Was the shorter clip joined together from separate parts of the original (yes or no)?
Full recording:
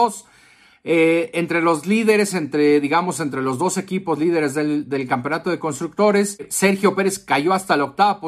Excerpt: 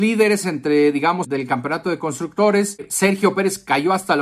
yes